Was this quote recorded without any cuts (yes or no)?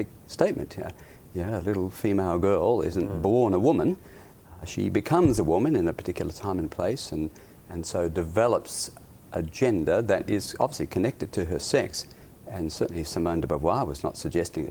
yes